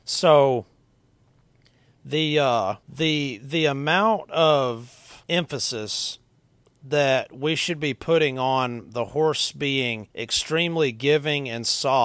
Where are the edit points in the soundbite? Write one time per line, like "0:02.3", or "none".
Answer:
0:02.8
0:05.2
0:10.1